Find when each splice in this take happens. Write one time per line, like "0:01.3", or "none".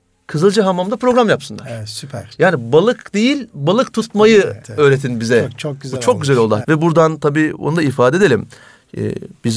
0:04.6
0:06.6

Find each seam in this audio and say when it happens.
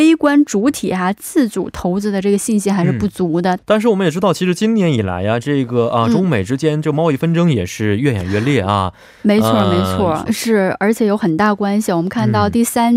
0:03.6
0:10.3

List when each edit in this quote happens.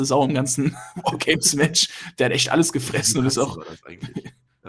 none

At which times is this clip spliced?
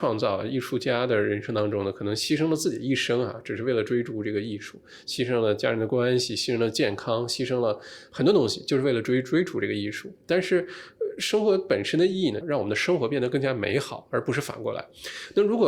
0:12.4

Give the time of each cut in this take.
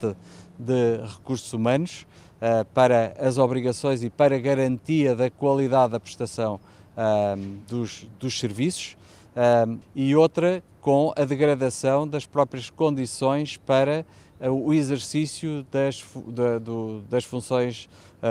0:09.8

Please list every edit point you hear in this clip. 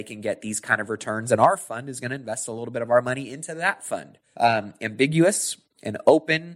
0:04.3

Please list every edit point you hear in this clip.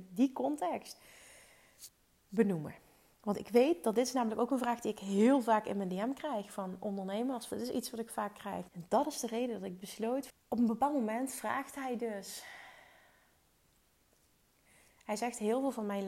0:07.5
0:08.7
0:10.3

